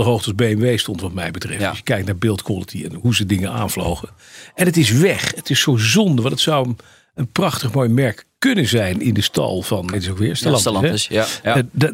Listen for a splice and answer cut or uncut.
cut